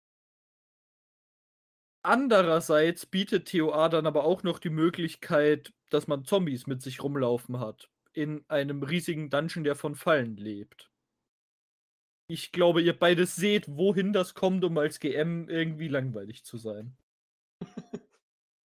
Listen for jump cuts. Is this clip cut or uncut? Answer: uncut